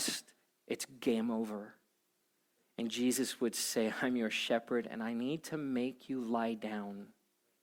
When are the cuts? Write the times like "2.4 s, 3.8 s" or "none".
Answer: 2.6 s